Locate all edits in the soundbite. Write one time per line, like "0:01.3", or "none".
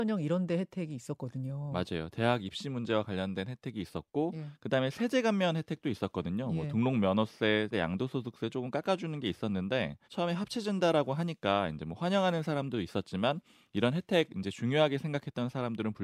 0:07.7
0:10.0